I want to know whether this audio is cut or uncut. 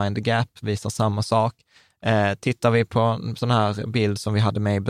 uncut